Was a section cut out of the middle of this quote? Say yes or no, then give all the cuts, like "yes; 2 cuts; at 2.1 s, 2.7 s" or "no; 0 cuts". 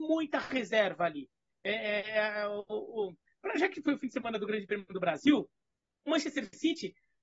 yes; 1 cut; at 6.1 s